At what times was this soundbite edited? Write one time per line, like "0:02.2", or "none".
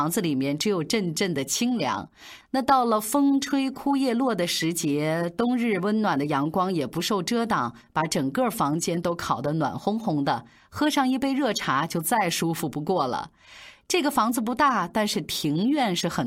none